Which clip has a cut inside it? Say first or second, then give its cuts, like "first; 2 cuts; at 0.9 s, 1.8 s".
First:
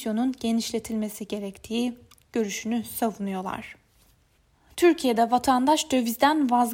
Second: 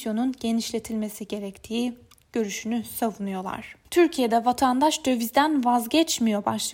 second; 1 cut; at 3.8 s